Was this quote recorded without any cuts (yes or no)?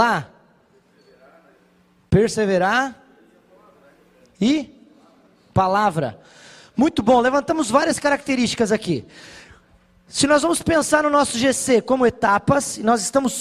yes